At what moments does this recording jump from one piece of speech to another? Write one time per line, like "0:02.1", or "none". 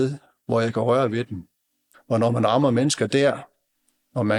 0:01.9